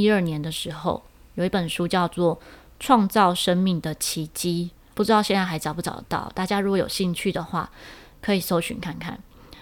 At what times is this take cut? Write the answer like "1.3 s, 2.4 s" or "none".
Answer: 4.9 s